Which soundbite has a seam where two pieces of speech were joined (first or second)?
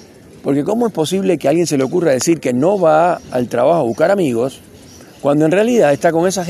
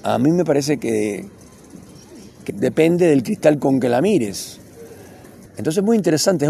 second